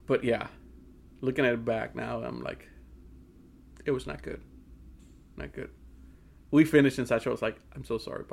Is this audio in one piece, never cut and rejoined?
yes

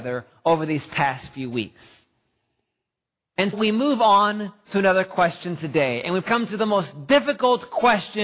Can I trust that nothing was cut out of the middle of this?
no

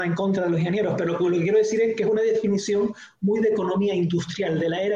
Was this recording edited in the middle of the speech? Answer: no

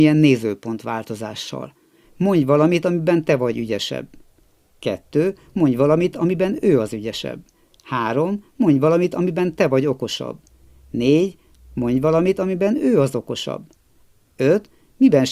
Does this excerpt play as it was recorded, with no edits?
no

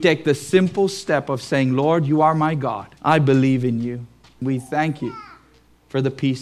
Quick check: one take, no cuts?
no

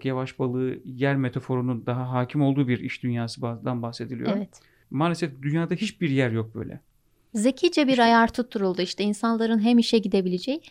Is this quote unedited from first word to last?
no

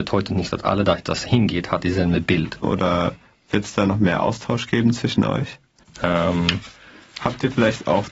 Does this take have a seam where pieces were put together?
yes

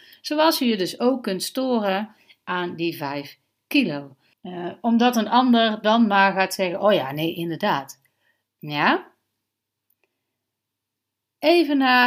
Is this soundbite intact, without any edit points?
no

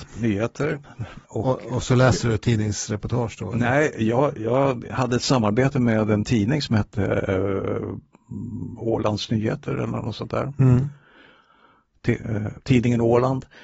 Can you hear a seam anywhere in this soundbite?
yes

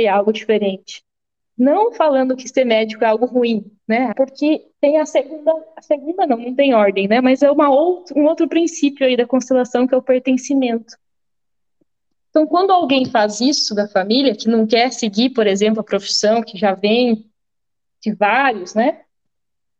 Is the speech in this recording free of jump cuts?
no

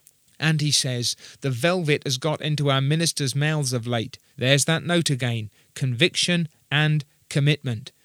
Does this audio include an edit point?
yes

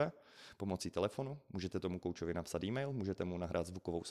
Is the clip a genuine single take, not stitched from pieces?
yes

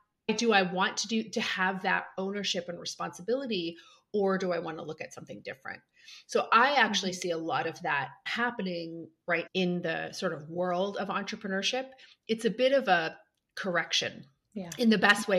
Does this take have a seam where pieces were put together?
yes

